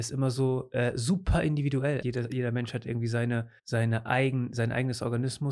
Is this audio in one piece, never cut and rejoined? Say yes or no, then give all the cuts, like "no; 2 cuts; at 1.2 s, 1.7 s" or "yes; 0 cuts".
no; 2 cuts; at 2.0 s, 3.6 s